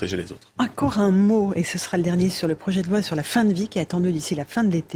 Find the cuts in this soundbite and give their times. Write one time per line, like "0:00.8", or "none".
none